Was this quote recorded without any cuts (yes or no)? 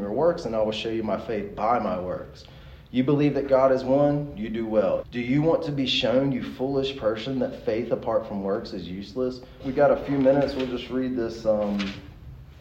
no